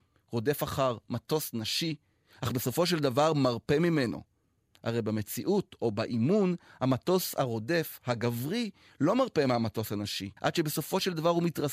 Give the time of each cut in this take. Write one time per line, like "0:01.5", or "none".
0:10.4